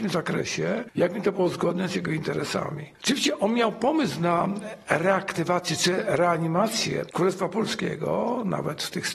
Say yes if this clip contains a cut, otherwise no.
no